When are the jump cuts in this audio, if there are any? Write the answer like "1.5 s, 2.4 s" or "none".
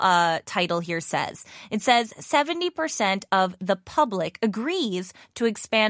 none